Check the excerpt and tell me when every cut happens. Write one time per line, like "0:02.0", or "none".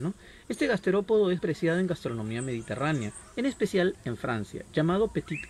0:01.4